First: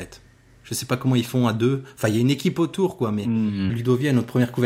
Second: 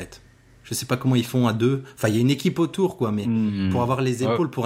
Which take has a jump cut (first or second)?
first